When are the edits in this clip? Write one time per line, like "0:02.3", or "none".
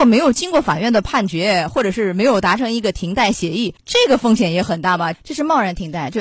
0:03.8
0:05.1

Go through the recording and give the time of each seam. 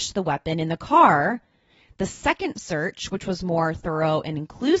none

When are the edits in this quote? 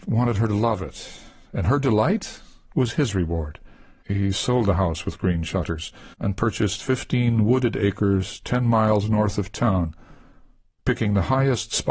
0:04.0
0:06.1

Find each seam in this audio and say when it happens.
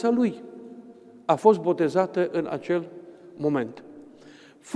none

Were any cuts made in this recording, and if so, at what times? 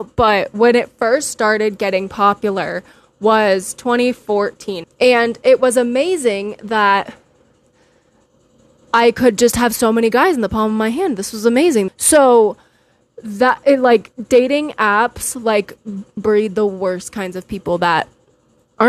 0:04.8
0:11.9
0:16.2

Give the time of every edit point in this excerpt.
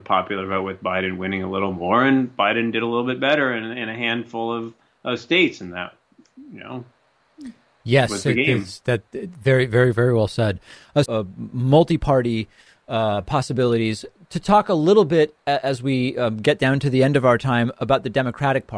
0:11.1

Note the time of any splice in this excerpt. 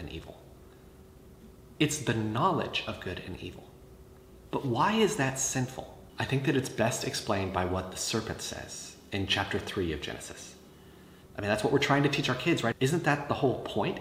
0:01.8
0:11.2
0:12.7

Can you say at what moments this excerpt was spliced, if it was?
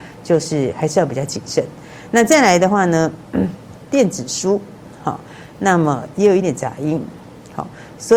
0:06.4

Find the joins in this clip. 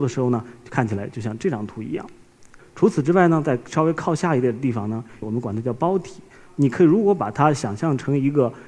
0:02.6
0:05.2

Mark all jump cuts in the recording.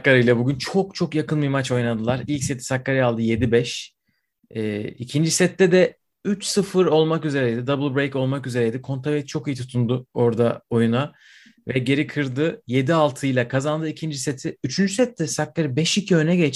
none

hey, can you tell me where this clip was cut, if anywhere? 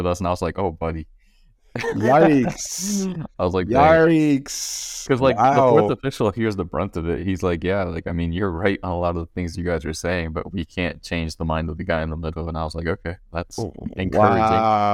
none

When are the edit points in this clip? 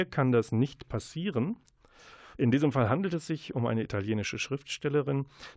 0:02.3

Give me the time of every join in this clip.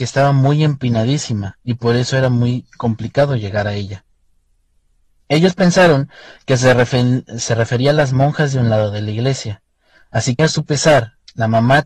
0:10.4

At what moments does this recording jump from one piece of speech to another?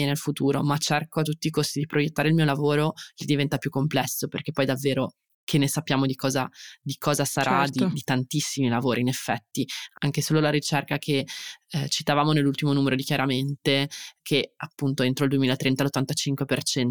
0:14.2

